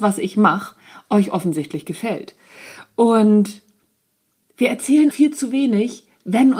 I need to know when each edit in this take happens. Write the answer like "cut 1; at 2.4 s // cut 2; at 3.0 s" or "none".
cut 1; at 5.1 s